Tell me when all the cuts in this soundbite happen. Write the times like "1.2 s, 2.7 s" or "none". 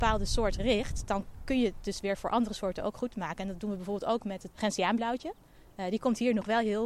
4.5 s